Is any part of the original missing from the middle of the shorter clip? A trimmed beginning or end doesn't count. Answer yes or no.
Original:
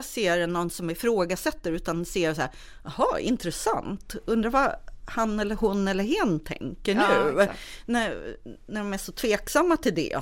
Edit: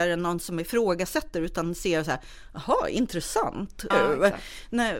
yes